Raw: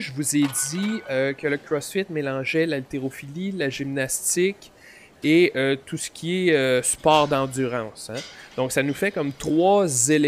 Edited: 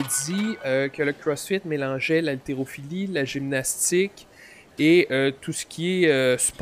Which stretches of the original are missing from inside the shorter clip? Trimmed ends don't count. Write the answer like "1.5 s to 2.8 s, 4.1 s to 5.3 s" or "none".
none